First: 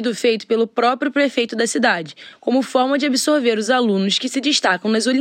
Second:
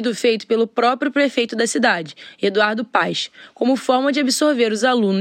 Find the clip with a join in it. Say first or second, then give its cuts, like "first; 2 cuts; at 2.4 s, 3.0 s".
first; 1 cut; at 2.3 s